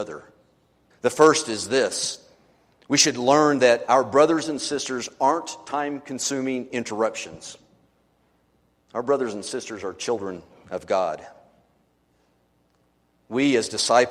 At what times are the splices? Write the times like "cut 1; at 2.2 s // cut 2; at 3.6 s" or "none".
cut 1; at 0.9 s